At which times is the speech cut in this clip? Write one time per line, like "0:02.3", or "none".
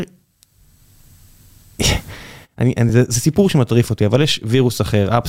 none